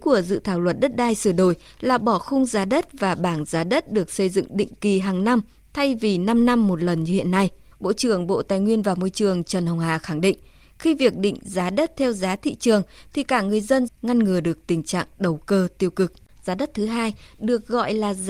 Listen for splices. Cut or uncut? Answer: cut